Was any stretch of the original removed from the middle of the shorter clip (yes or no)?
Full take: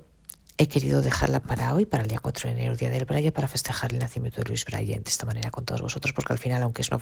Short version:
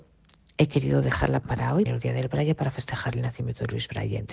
yes